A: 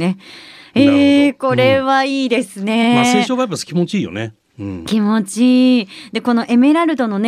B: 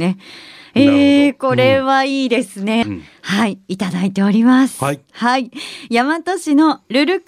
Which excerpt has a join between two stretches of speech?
B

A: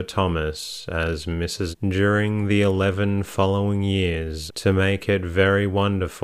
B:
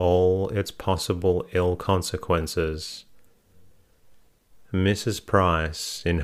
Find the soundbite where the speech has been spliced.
A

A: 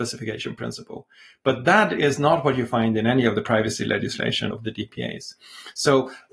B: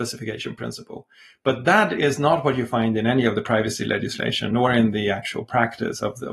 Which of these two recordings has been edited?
A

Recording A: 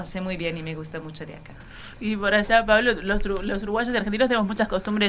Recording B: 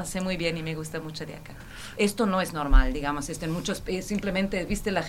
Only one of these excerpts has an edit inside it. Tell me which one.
B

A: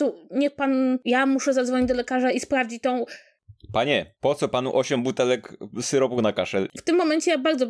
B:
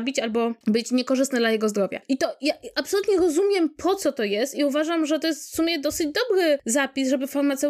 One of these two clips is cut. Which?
A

